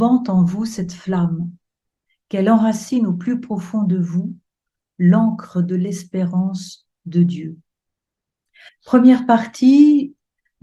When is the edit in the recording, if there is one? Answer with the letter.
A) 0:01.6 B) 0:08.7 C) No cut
B